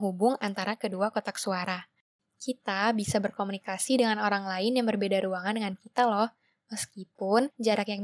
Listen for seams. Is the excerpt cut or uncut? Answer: cut